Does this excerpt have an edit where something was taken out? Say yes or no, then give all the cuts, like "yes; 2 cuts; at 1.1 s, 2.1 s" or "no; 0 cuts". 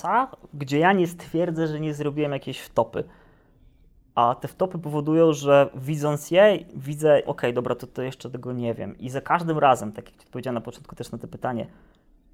yes; 1 cut; at 7.3 s